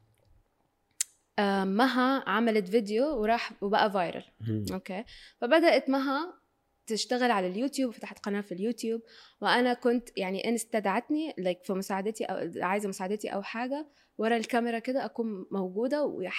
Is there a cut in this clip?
no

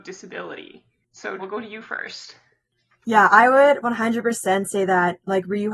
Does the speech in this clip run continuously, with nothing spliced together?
no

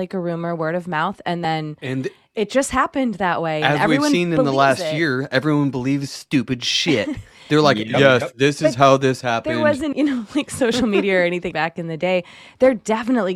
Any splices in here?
yes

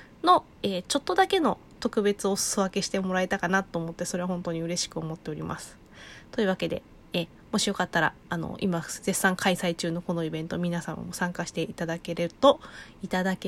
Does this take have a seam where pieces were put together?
no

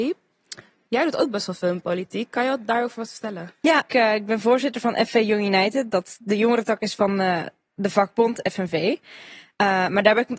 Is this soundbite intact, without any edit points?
no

